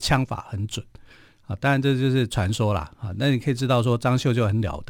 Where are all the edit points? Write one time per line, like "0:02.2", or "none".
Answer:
none